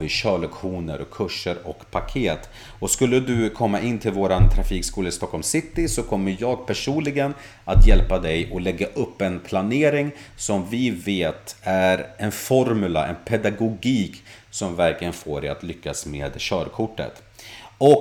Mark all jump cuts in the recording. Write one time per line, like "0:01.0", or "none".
none